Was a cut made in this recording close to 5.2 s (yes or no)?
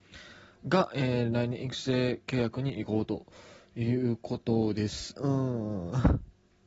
yes